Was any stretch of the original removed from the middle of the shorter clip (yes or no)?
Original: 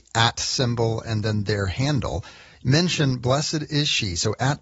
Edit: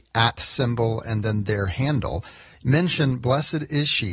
no